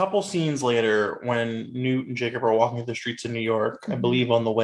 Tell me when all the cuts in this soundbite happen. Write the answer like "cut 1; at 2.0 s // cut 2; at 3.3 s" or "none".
none